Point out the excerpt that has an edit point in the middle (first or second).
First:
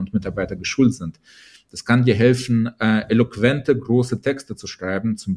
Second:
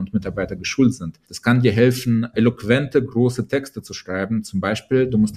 second